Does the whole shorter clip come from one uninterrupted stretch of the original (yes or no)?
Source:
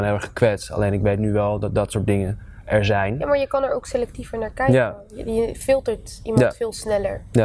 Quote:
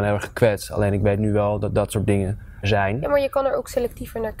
no